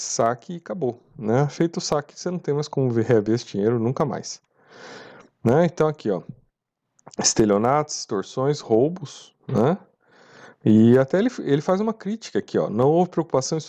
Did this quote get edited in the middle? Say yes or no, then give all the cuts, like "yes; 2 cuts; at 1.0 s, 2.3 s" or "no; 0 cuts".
no; 0 cuts